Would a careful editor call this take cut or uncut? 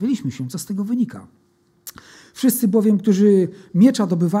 cut